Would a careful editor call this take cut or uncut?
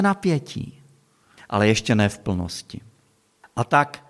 cut